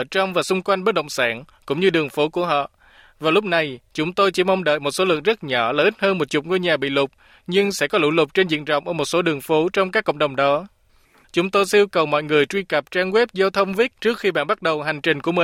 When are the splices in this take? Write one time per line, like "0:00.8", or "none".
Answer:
0:11.2
0:14.0